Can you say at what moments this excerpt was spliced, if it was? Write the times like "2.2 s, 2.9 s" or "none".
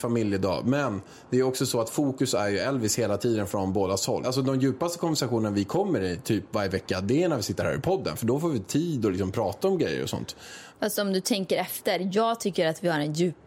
4.2 s, 10.7 s

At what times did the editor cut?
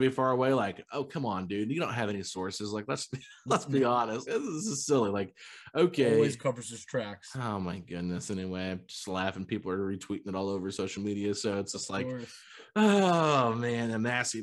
4.3 s

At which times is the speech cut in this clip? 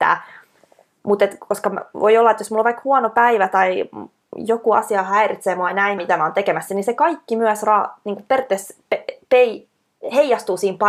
6.0 s

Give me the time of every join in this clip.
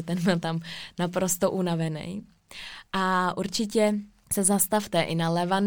none

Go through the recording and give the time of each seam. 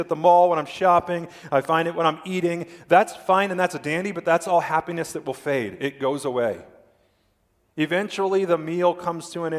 none

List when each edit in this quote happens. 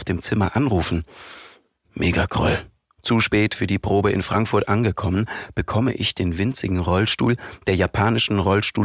2.9 s

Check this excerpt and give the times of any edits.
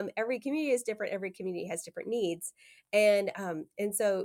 none

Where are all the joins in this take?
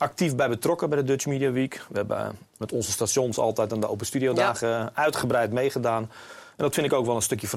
none

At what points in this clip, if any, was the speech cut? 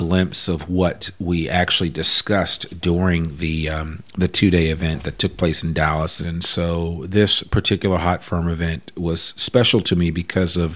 6.2 s

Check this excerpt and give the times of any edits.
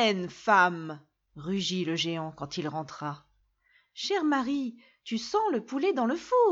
none

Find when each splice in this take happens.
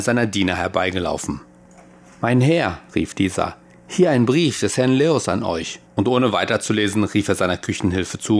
5.8 s

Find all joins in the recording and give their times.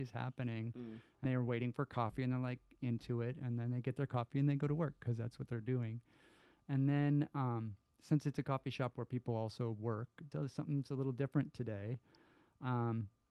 1.2 s, 10.3 s

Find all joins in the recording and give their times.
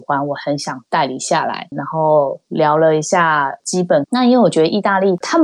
1.7 s, 4.0 s

